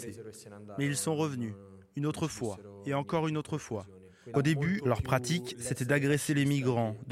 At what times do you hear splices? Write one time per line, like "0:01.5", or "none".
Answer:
0:04.3